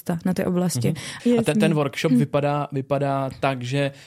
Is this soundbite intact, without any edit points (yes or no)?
no